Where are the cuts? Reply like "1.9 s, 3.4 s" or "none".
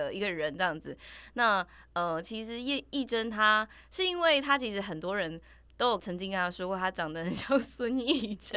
none